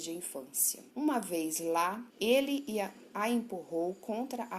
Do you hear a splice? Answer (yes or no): yes